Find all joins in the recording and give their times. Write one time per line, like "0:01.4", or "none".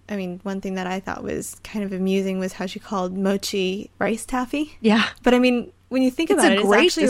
none